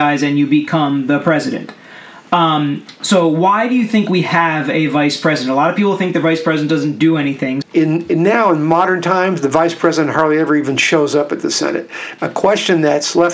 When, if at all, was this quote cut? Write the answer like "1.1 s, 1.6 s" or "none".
7.6 s, 12.2 s